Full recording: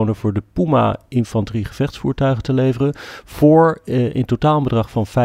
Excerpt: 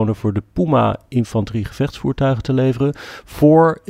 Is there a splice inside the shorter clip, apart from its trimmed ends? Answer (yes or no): no